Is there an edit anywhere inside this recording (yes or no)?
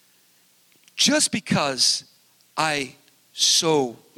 no